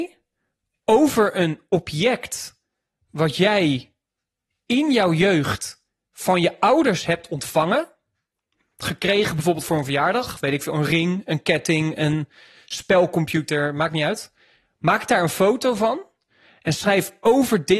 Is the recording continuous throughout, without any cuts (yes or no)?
yes